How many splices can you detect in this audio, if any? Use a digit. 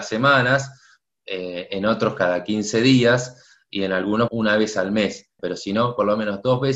2